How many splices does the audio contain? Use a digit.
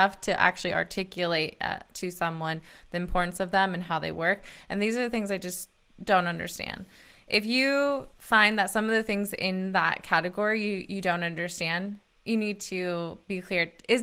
1